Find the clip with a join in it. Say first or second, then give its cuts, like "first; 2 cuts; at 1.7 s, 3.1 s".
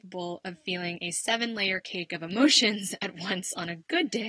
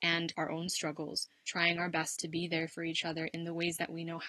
second; 1 cut; at 1.5 s